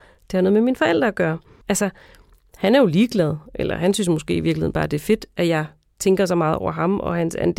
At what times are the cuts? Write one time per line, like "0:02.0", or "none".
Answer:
0:01.6